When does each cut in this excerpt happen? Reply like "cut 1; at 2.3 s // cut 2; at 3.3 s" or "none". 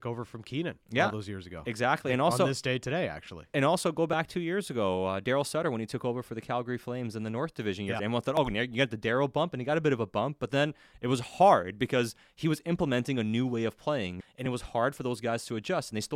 cut 1; at 8.0 s // cut 2; at 14.2 s